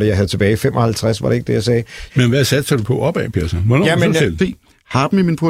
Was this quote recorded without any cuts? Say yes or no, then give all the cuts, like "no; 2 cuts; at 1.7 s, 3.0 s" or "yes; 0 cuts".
no; 2 cuts; at 2.1 s, 4.4 s